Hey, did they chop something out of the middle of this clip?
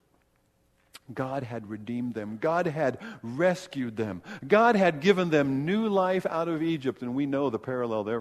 no; 0 cuts

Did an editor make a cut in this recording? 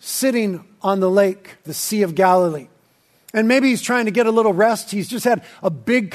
yes; 1 cut; at 1.6 s

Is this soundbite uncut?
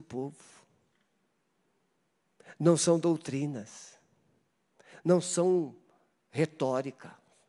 yes; 0 cuts

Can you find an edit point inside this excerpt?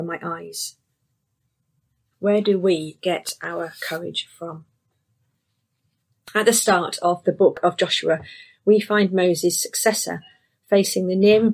yes; 1 cut; at 2.1 s

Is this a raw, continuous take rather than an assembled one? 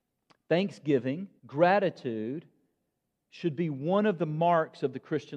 no; 1 cut; at 1.4 s

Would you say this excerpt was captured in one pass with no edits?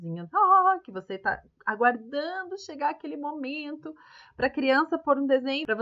yes; 0 cuts

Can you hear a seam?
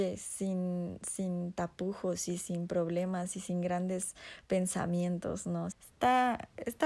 yes; 1 cut; at 5.7 s

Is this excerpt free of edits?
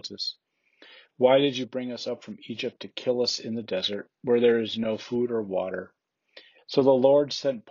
no; 1 cut; at 6.6 s

